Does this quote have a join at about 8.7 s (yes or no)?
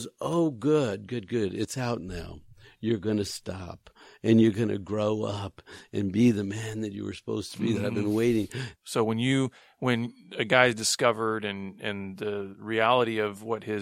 yes